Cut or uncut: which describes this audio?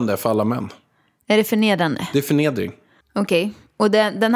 cut